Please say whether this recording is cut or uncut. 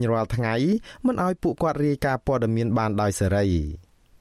uncut